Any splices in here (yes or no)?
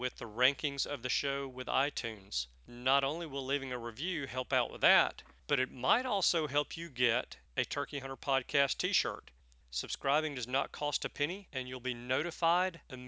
yes